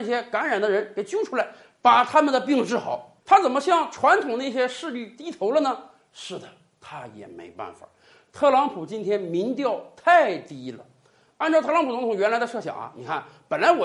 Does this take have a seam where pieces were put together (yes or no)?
yes